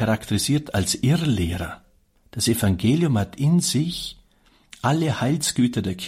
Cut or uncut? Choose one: cut